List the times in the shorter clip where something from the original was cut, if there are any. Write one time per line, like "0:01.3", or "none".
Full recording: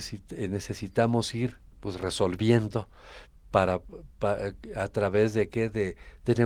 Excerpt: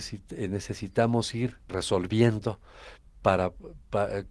0:01.7